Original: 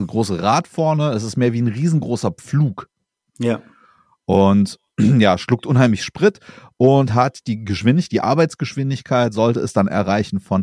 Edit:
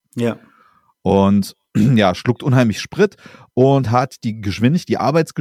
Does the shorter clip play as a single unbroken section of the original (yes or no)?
yes